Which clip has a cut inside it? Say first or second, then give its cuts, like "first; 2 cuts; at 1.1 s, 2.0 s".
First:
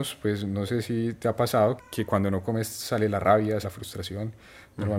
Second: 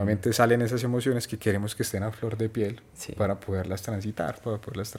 first; 2 cuts; at 1.8 s, 3.6 s